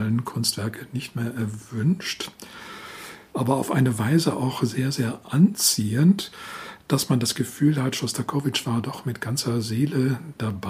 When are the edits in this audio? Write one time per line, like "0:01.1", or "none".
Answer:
0:03.3